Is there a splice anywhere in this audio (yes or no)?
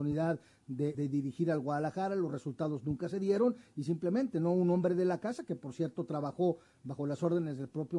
yes